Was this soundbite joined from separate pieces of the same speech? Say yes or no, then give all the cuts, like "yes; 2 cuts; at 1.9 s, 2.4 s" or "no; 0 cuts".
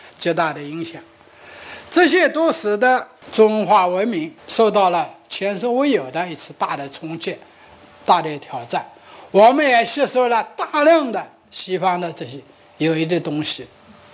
no; 0 cuts